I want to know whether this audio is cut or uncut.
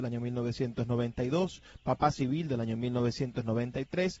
uncut